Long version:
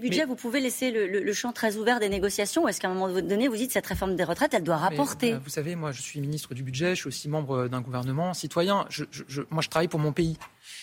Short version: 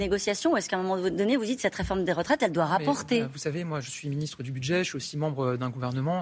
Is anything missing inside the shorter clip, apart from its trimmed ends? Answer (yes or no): no